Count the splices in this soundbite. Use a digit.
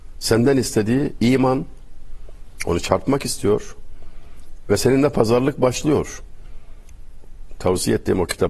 1